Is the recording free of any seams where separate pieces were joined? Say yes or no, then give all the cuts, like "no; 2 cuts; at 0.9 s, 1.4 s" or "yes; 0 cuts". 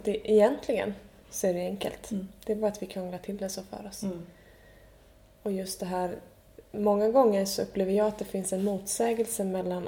yes; 0 cuts